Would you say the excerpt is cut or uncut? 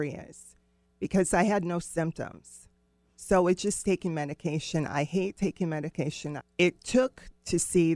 cut